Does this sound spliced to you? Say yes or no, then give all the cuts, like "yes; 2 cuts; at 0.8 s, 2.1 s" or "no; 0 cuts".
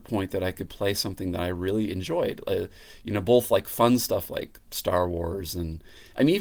no; 0 cuts